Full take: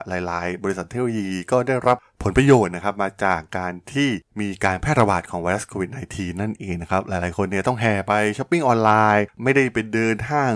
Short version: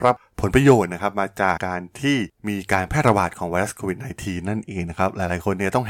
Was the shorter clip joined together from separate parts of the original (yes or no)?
yes